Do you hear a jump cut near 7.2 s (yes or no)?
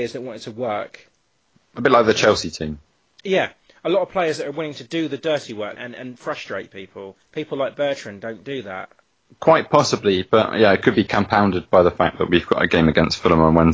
yes